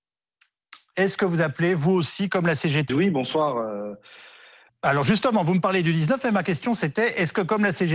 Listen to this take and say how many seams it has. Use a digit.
3